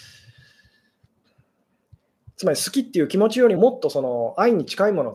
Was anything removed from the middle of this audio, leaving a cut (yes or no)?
yes